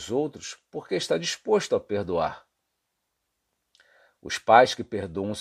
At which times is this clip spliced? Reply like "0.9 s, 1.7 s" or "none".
none